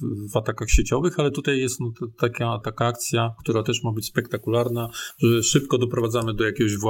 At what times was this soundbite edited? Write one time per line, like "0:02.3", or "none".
0:02.6